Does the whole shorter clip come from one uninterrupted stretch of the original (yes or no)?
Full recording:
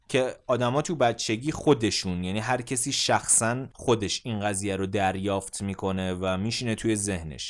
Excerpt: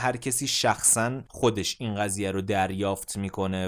yes